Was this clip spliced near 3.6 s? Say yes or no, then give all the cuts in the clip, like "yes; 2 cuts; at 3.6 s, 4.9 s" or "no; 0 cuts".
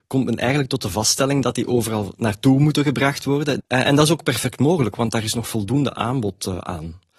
yes; 1 cut; at 3.6 s